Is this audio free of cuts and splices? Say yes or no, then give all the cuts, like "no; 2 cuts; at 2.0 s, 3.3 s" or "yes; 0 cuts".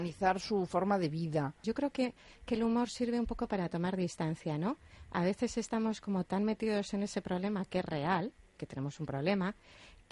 no; 2 cuts; at 1.6 s, 8.6 s